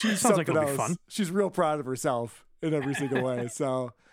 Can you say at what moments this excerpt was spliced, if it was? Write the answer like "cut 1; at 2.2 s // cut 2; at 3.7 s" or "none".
none